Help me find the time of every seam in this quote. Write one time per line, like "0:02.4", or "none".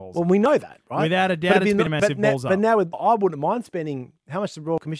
0:02.9